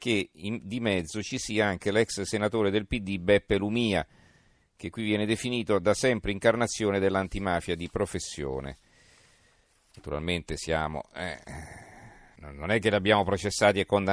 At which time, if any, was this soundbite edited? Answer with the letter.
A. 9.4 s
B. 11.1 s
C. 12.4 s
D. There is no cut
C